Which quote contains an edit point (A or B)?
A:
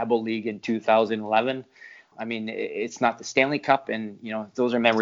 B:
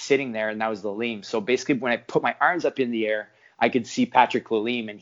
A